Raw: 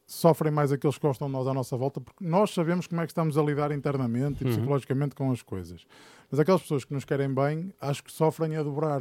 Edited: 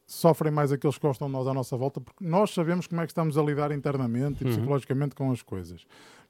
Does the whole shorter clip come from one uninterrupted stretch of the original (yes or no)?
yes